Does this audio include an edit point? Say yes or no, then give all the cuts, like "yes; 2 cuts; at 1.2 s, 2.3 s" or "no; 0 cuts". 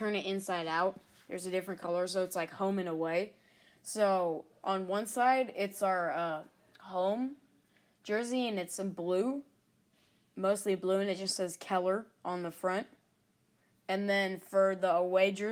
no; 0 cuts